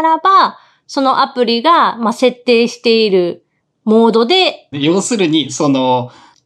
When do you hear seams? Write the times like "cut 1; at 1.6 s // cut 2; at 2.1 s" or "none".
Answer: cut 1; at 4.7 s